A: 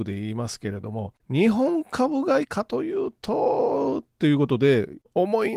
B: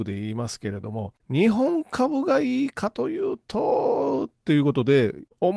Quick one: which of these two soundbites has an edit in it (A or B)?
A